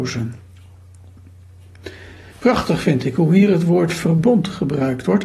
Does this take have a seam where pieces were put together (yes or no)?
yes